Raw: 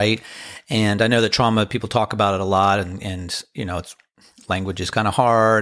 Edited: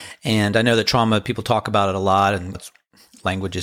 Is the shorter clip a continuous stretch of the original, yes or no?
no